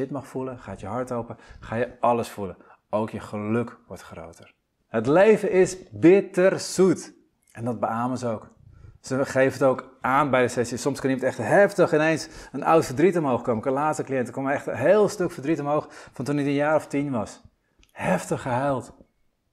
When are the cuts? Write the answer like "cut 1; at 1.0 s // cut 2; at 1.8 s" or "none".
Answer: cut 1; at 4.9 s // cut 2; at 7.3 s